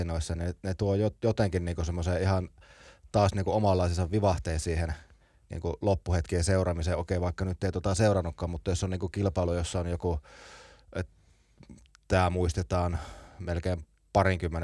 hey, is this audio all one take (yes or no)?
yes